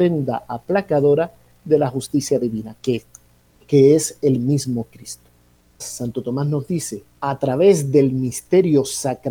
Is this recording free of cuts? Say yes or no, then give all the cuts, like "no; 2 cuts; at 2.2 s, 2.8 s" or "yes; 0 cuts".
no; 2 cuts; at 5.8 s, 7.1 s